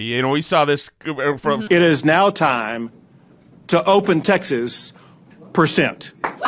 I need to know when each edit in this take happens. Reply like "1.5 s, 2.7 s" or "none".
1.7 s, 5.3 s